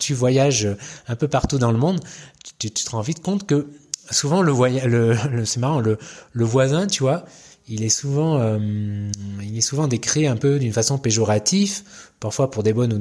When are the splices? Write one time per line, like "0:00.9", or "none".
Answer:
none